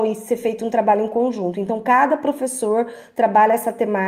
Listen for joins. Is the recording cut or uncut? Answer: uncut